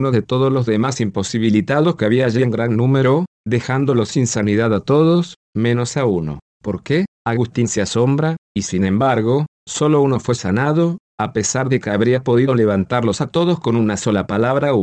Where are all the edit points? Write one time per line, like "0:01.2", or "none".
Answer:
0:08.4